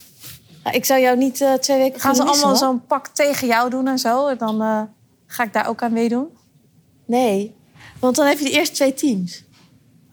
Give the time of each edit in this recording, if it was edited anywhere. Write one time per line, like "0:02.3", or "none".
none